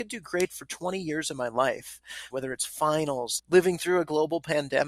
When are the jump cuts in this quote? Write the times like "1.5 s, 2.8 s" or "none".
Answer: 2.3 s, 3.4 s